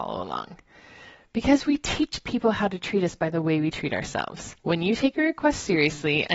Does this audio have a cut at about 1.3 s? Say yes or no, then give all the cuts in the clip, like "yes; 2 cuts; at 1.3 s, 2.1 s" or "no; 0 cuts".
no; 1 cut; at 4.6 s